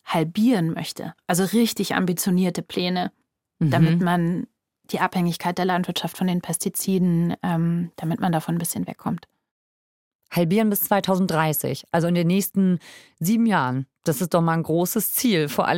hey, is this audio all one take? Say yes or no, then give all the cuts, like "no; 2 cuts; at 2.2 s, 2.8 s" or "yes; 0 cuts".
yes; 0 cuts